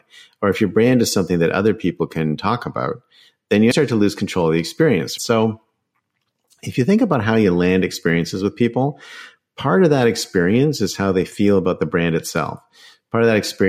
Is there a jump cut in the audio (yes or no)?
yes